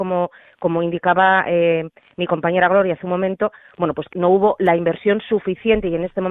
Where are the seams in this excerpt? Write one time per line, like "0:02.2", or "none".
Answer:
0:04.1